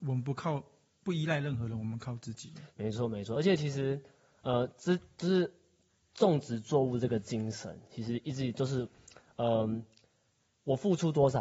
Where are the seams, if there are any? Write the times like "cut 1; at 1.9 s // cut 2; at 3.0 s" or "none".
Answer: none